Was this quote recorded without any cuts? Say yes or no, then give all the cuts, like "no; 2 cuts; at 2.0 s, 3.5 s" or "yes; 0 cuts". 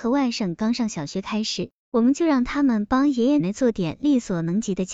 no; 1 cut; at 3.4 s